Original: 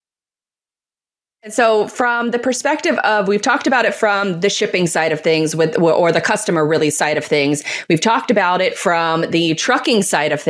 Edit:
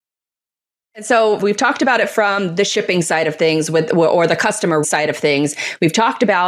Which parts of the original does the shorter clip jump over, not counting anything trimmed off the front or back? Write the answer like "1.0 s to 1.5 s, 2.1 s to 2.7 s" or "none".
1.9 s to 3.2 s, 6.7 s to 6.9 s